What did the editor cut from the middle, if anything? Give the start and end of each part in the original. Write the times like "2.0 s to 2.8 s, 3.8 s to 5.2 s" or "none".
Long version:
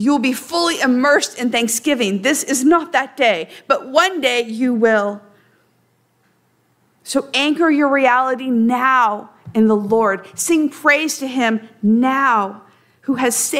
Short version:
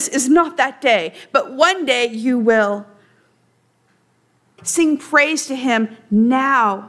6.9 s to 10.3 s

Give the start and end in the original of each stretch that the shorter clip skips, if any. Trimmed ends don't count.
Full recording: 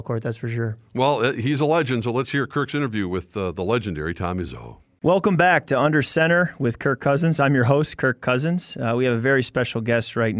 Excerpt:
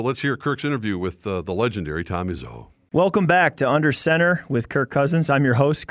none

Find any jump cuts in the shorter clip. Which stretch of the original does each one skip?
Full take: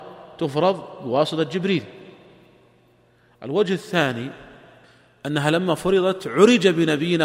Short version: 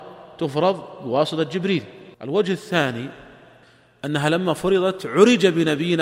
2.1 s to 3.4 s

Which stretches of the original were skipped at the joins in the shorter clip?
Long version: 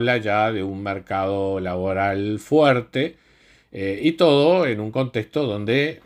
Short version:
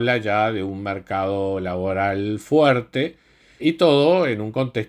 3.6 s to 4.0 s

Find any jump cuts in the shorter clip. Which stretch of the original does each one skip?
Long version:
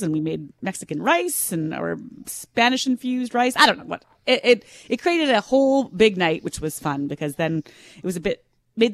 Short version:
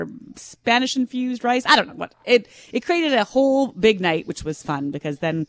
4.1 s to 4.4 s

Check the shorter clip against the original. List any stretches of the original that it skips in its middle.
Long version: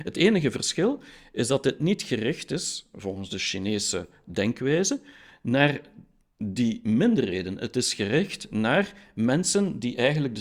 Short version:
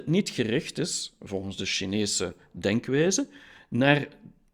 none

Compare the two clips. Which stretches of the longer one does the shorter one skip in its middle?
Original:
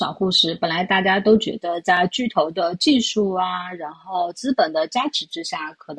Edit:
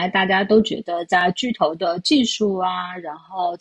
none

